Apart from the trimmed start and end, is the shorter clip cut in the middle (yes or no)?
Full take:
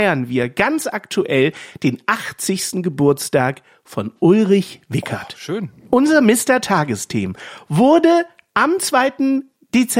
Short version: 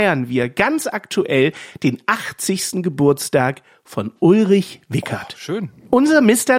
no